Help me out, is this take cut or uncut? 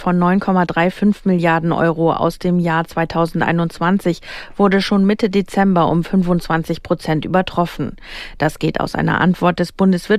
uncut